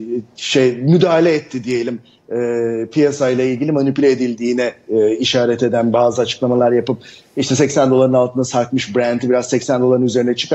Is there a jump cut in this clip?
no; 0 cuts

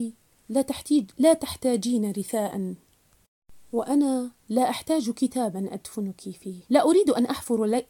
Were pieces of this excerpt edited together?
yes; 1 cut; at 6.7 s

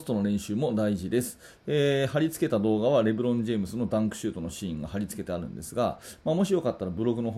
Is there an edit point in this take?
yes; 1 cut; at 1.5 s

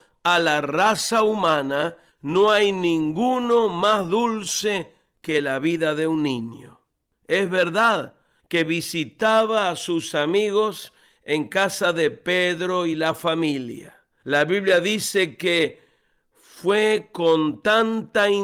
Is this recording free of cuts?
no; 2 cuts; at 8.4 s, 14.1 s

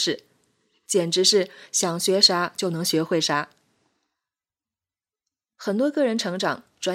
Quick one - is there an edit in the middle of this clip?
no; 0 cuts

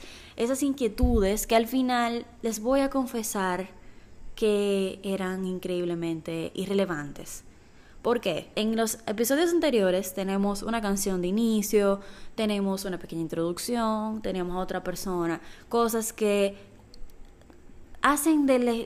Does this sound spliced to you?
yes; 1 cut; at 8.5 s

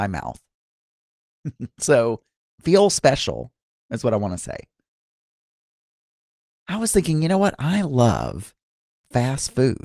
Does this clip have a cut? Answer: no; 0 cuts

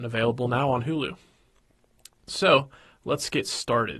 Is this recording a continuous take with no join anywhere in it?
yes; 0 cuts

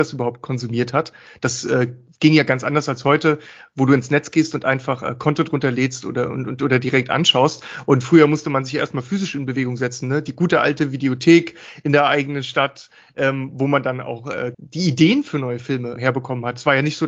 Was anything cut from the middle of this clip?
yes; 2 cuts; at 14.5 s, 16.0 s

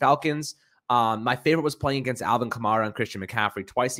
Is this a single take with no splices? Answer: yes; 0 cuts

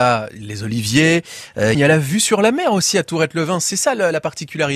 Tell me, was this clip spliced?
yes; 1 cut; at 1.7 s

